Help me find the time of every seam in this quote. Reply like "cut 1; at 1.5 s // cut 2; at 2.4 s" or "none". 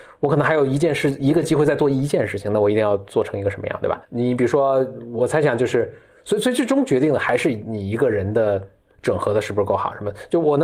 cut 1; at 4.0 s // cut 2; at 5.2 s